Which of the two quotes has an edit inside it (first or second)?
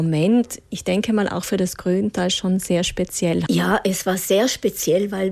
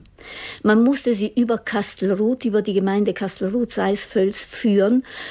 first